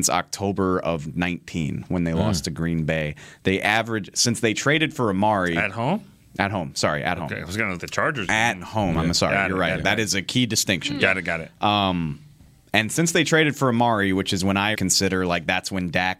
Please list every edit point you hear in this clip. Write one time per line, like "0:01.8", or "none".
0:07.8
0:14.7